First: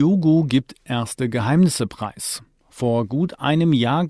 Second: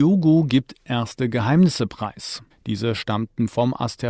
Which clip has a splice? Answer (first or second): second